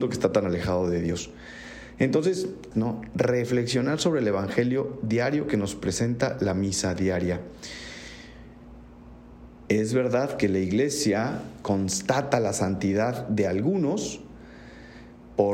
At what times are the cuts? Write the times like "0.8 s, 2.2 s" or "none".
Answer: 2.7 s, 9.7 s